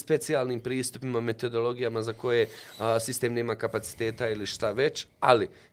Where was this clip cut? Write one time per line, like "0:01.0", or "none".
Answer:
none

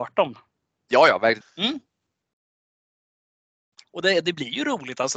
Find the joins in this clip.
0:01.4

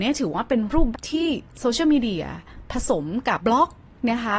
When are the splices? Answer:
0:00.9
0:03.4

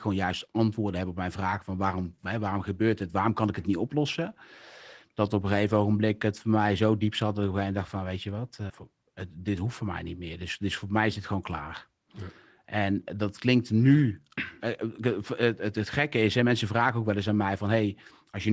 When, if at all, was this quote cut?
0:08.7

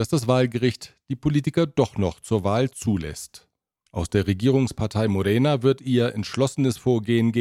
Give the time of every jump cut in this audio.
0:03.7

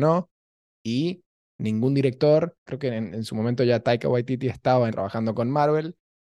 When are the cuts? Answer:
0:02.7
0:04.9

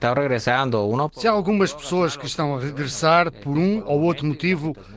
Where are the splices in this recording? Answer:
none

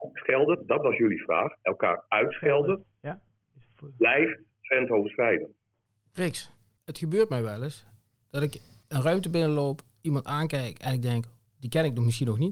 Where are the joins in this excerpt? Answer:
none

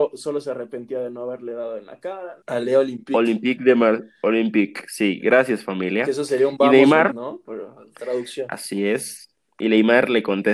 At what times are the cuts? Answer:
0:02.4
0:07.1

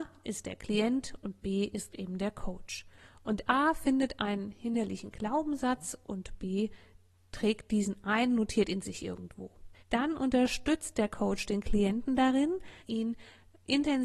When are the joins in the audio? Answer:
0:09.8
0:12.8

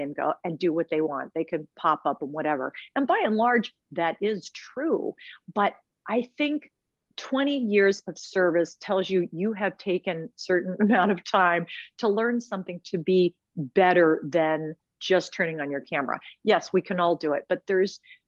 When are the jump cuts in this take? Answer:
none

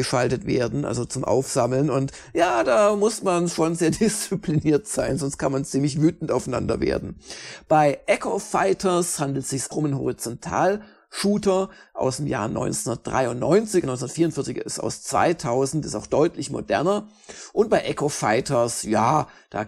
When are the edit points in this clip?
0:13.8

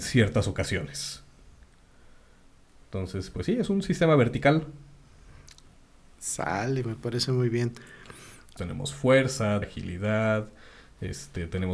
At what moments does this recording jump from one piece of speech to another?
0:08.6
0:09.6

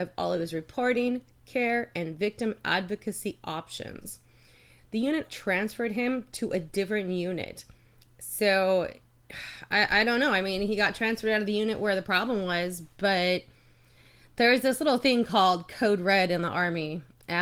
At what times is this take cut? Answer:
0:05.3

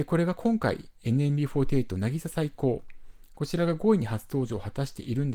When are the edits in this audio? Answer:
none

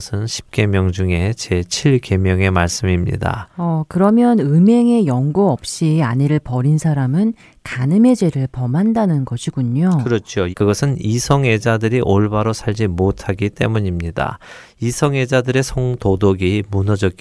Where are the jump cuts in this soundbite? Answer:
0:10.5

